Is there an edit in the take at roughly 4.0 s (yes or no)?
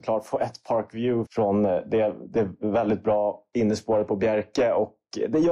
no